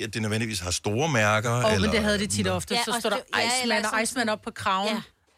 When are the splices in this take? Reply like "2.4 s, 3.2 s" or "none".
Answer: none